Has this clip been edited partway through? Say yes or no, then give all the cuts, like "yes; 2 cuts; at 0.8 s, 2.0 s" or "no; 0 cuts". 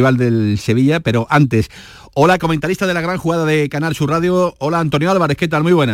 no; 0 cuts